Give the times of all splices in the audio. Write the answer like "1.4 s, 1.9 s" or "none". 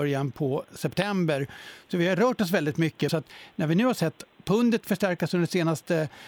3.1 s